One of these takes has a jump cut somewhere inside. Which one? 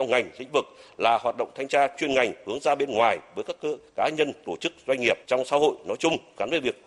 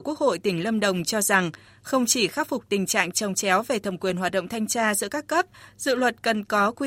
first; 1 cut; at 5.2 s

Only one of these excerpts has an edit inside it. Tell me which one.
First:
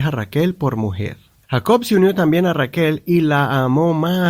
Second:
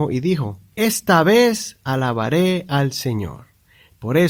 first; 1 cut; at 1.4 s

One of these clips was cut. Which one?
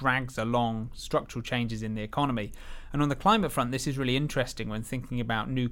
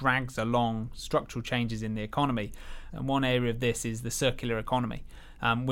second; 1 cut; at 2.9 s

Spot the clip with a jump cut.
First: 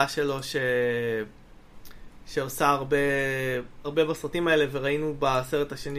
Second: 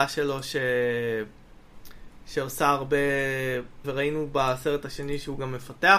second; 1 cut; at 3.8 s

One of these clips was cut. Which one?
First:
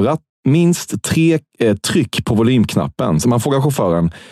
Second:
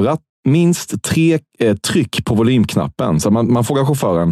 first; 1 cut; at 3.2 s

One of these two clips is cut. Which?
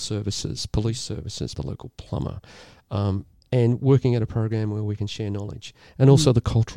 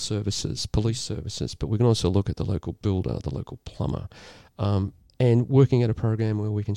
first; 1 cut; at 1.5 s

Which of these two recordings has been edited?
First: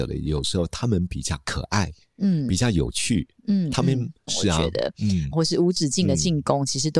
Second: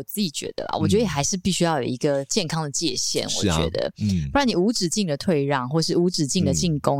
first; 2 cuts; at 4.3 s, 5.3 s

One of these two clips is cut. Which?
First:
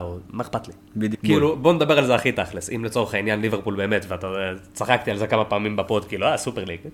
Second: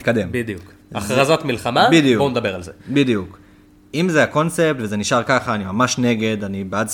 first; 1 cut; at 1.1 s

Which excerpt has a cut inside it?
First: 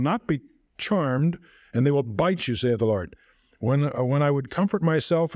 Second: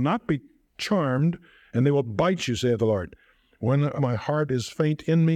second; 1 cut; at 4.0 s

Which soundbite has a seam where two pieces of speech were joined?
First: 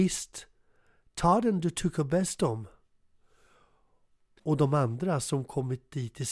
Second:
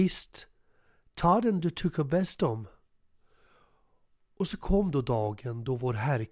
first; 1 cut; at 4.4 s

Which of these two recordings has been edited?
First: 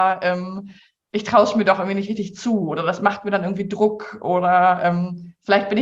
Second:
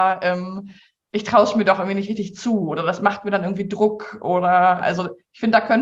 second; 1 cut; at 4.8 s

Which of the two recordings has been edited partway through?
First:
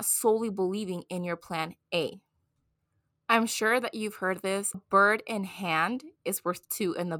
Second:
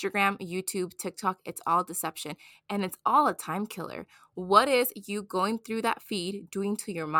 first; 1 cut; at 4.7 s

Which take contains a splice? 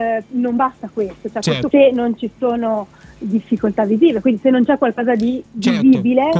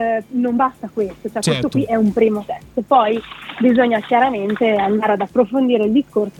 first; 1 cut; at 1.7 s

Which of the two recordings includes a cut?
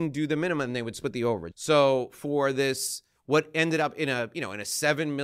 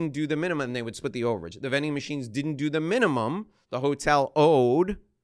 first; 1 cut; at 1.5 s

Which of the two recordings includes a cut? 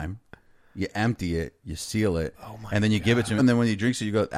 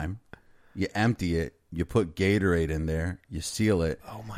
first; 2 cuts; at 1.6 s, 3.4 s

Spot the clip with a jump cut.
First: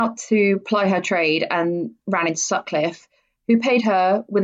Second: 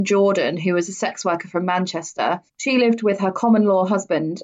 second; 1 cut; at 2.5 s

